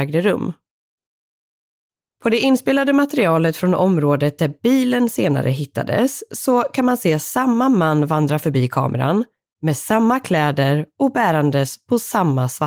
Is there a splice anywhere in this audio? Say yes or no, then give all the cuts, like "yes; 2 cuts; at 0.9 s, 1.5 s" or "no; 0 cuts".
no; 0 cuts